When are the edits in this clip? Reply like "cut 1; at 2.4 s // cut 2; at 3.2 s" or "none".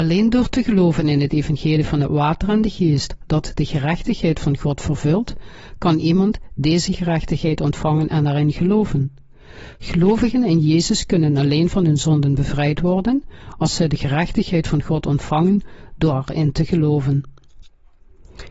none